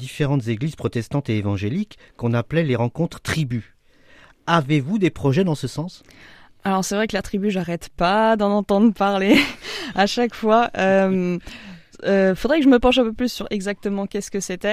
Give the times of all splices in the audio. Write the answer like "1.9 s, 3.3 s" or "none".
none